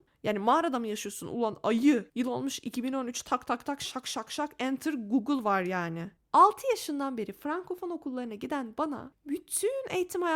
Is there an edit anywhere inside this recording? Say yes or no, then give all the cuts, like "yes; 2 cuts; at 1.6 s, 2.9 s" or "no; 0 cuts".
no; 0 cuts